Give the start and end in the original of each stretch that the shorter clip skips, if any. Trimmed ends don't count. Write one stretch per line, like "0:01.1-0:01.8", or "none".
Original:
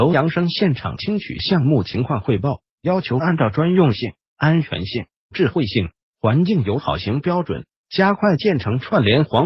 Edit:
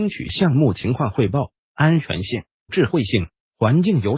0:02.7-0:04.2